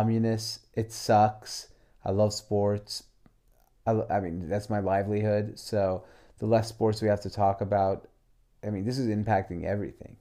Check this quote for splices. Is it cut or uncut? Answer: uncut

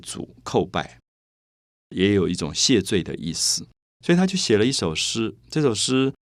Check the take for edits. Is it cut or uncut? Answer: uncut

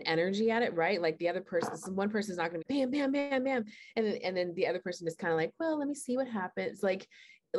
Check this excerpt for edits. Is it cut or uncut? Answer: cut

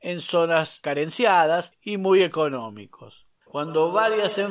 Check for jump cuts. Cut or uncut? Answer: cut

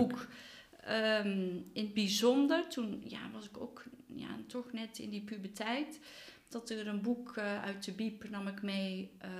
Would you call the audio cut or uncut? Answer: uncut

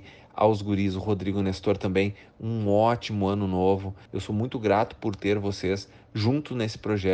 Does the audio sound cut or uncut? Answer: cut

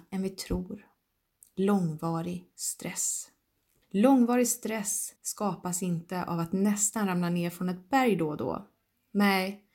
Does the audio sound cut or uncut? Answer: cut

